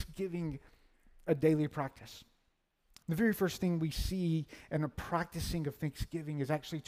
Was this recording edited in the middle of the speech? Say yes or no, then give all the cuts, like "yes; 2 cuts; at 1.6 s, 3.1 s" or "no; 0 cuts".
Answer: yes; 1 cut; at 3.0 s